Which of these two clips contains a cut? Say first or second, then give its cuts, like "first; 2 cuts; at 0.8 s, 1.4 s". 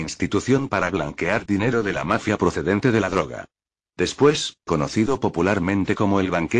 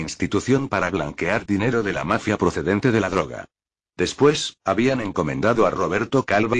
first; 1 cut; at 4.6 s